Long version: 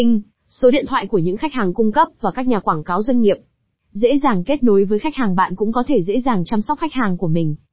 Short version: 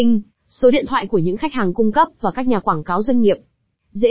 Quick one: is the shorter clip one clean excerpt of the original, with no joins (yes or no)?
yes